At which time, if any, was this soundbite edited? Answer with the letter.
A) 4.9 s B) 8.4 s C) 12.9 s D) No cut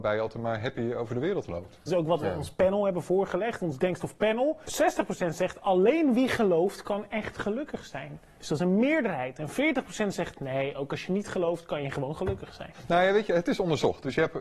D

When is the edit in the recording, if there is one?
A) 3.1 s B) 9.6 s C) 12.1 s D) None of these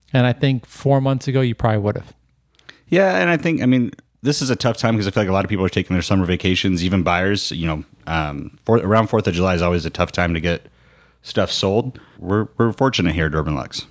C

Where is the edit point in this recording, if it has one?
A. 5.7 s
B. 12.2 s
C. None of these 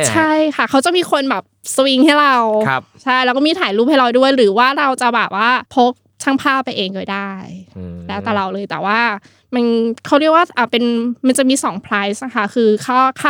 A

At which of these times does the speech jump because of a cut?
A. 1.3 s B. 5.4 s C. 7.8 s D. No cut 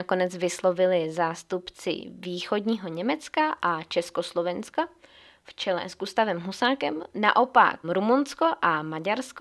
C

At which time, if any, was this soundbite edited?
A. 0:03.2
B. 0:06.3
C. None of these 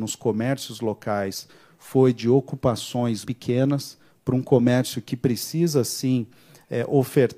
A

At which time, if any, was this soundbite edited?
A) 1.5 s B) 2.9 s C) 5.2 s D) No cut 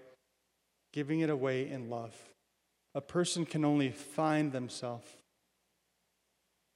B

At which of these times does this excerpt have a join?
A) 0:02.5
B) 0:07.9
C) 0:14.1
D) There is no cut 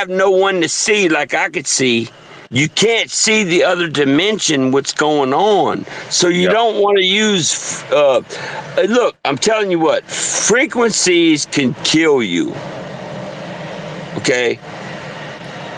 A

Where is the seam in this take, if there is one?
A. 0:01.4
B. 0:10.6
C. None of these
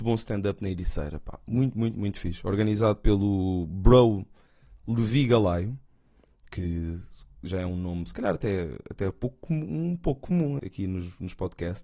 B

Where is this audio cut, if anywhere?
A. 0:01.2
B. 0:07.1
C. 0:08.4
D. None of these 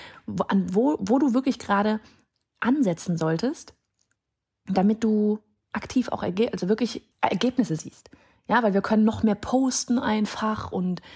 B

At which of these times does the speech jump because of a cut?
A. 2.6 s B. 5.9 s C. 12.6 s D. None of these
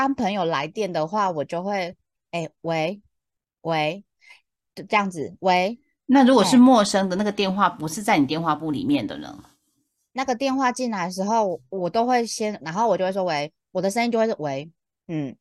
C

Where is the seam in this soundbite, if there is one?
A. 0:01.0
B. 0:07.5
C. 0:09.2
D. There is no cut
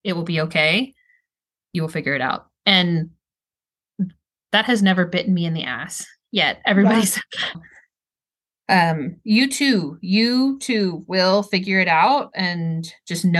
B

